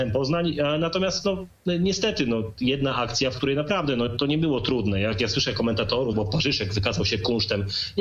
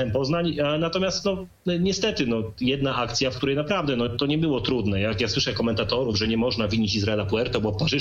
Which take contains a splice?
first; 1 cut; at 6.1 s

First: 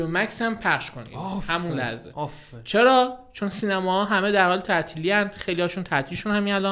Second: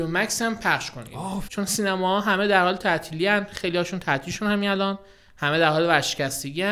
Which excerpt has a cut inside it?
second; 1 cut; at 1.5 s

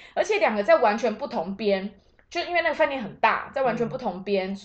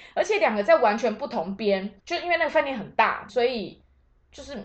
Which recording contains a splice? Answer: second; 2 cuts; at 2.0 s, 3.3 s

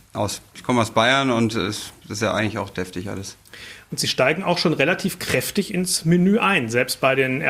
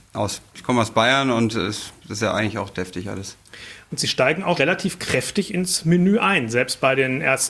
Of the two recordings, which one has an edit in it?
second; 1 cut; at 4.6 s

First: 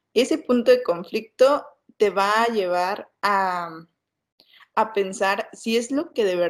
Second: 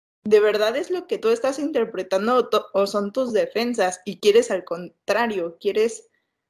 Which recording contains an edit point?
second; 1 cut; at 1.2 s

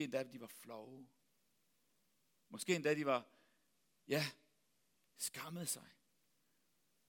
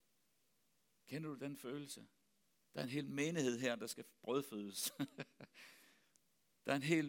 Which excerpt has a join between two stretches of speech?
second; 1 cut; at 2.6 s

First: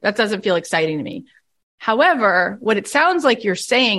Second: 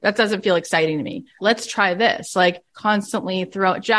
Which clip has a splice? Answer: second; 2 cuts; at 1.4 s, 2.7 s

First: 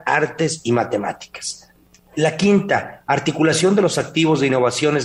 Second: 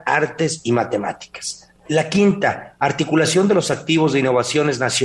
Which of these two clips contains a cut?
second; 1 cut; at 1.8 s

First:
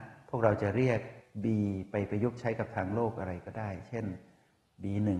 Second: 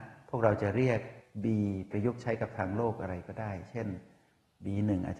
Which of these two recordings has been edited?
second; 1 cut; at 1.9 s

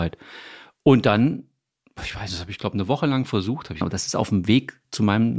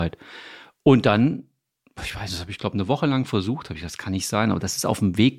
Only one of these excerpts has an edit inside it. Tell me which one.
first; 1 cut; at 3.8 s

